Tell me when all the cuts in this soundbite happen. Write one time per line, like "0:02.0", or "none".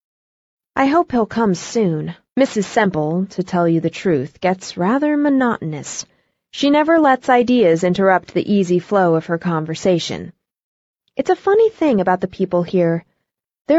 0:02.3